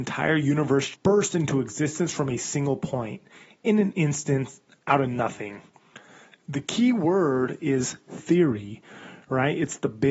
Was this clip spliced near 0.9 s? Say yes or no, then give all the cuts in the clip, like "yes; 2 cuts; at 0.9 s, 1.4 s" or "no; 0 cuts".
yes; 1 cut; at 0.9 s